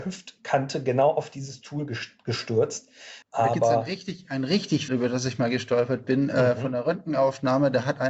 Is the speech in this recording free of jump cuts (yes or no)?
no